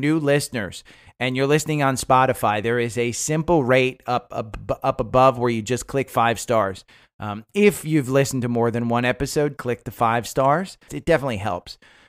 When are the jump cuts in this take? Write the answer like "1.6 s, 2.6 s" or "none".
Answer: 9.6 s, 10.9 s

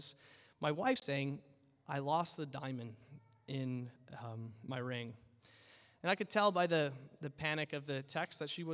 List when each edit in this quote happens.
none

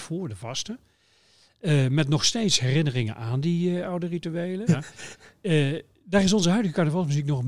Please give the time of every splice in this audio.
4.7 s

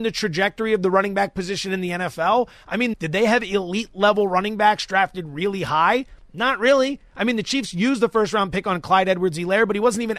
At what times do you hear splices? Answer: 2.9 s

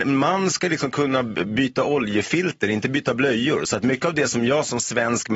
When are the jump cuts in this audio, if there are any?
none

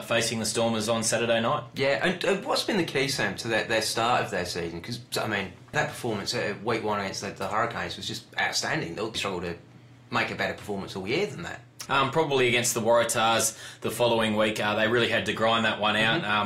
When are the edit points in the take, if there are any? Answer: 5.7 s, 9.1 s, 11.9 s

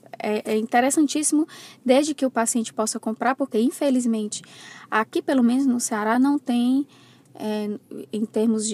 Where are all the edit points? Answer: none

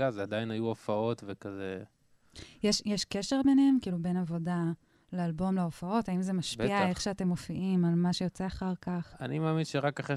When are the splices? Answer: none

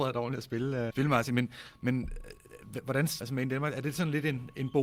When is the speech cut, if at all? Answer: 0.9 s, 3.2 s

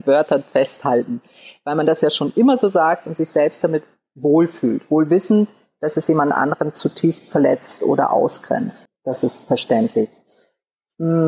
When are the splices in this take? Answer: 8.9 s

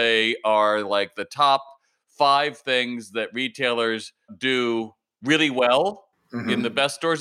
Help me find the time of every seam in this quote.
none

